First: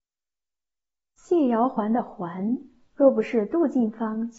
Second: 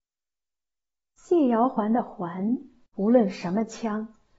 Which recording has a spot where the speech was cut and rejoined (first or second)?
second